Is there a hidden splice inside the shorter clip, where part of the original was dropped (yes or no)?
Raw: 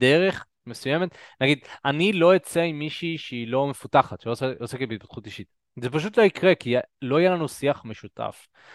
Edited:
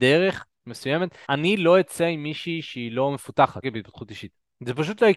yes